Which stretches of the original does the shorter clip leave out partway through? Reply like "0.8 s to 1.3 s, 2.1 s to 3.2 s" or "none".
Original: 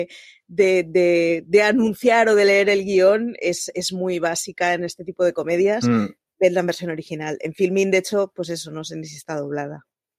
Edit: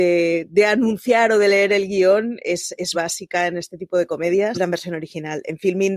3.9 s to 4.2 s, 5.8 s to 6.5 s